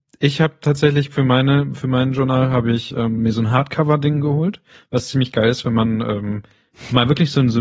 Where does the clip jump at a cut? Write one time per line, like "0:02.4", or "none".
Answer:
none